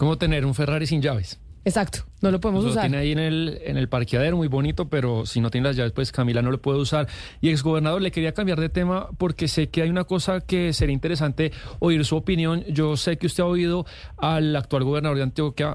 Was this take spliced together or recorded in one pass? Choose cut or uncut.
uncut